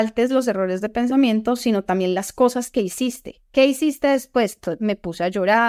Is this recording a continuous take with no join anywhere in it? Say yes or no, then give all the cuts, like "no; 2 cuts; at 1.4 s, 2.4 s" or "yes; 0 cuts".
yes; 0 cuts